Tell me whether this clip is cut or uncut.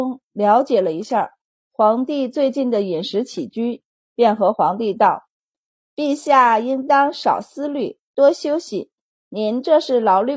uncut